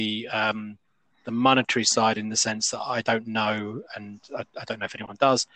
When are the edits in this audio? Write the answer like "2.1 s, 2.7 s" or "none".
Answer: none